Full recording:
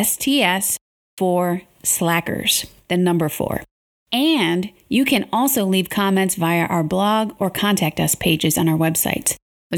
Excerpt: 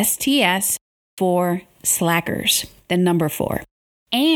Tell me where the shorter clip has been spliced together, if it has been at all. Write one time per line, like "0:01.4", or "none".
none